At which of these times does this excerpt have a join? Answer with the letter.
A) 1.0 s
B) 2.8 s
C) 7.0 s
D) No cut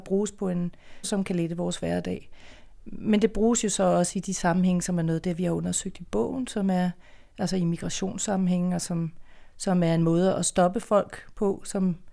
A